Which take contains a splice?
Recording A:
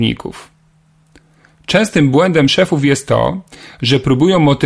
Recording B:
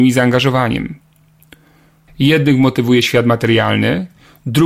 B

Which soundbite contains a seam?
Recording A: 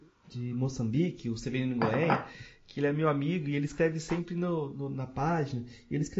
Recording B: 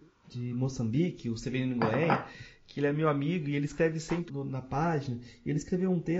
B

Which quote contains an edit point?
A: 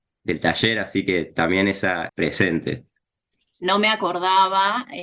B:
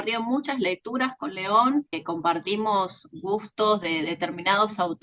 A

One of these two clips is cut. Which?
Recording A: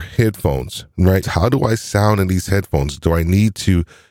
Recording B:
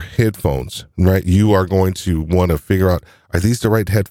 A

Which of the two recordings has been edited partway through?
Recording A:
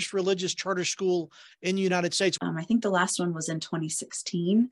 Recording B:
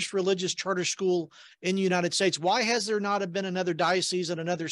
A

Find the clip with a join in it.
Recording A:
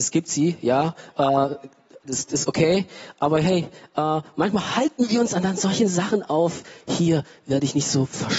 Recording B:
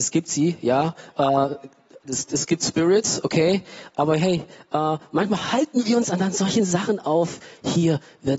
A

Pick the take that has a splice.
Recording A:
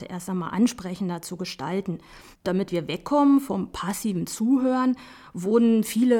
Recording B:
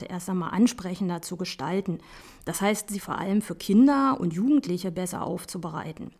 A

